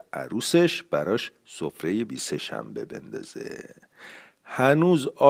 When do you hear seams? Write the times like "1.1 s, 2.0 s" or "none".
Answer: 2.1 s